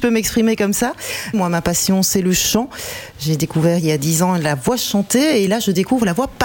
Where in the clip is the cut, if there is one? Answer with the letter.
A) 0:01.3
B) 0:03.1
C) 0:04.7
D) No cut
A